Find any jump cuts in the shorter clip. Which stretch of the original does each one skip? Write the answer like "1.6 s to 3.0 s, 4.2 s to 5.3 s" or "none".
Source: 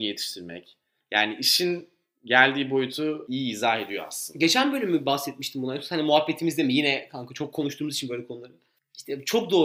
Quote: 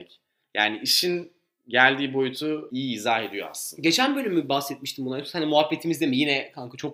none